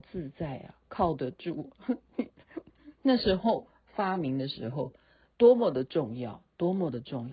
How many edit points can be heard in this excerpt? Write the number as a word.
zero